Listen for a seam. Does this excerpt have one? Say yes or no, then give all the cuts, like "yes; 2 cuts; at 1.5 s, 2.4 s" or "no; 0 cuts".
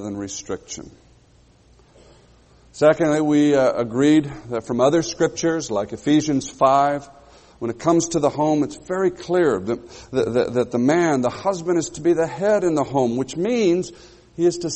no; 0 cuts